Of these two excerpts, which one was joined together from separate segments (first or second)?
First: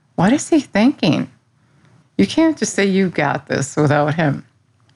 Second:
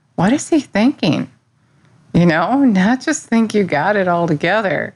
first